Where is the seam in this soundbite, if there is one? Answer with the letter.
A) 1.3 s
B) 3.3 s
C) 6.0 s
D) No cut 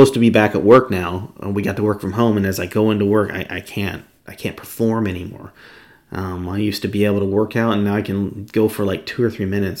D